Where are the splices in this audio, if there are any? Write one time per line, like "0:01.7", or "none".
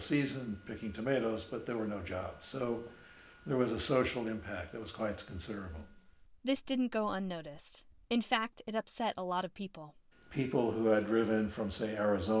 0:10.1